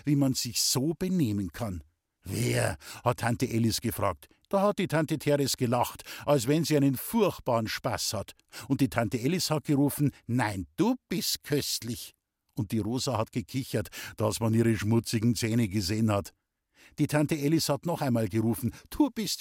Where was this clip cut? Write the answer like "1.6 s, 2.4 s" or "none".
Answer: 4.5 s